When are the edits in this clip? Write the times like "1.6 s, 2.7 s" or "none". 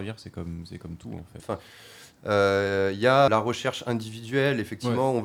1.4 s, 3.3 s